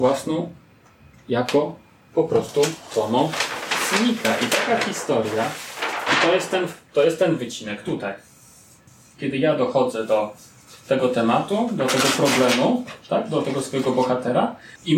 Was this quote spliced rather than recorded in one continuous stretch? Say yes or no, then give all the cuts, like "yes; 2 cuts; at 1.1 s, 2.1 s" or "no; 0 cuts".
no; 0 cuts